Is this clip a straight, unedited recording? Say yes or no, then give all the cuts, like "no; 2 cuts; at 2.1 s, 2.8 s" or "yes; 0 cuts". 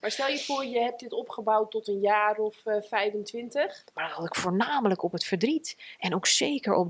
no; 1 cut; at 3.8 s